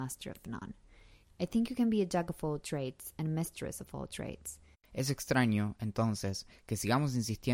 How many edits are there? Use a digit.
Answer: 2